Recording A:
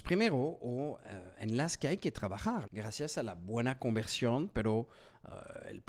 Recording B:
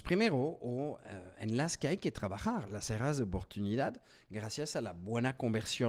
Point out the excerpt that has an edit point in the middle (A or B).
A